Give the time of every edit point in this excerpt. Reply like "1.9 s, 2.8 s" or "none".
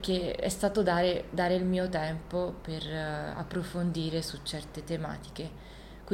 none

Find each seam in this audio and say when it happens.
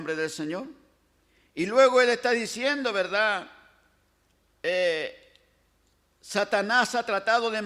none

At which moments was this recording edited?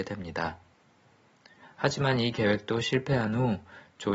1.6 s

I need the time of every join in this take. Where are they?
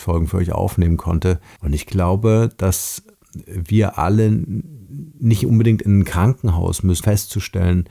1.6 s, 7.0 s

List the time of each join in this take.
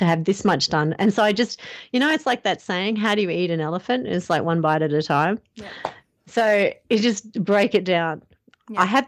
none

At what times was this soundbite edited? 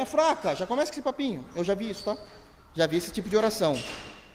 none

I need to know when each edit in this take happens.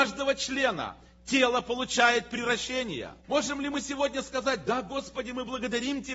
3.2 s

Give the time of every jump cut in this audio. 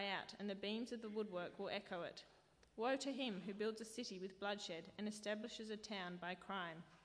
none

